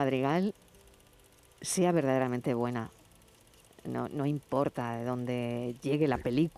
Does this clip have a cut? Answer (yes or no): no